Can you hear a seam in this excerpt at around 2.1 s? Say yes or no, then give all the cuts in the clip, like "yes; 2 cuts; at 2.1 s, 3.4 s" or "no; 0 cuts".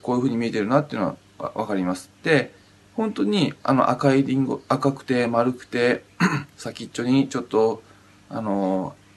yes; 1 cut; at 2.1 s